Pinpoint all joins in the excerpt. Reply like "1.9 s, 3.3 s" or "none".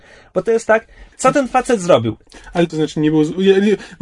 1.1 s, 2.7 s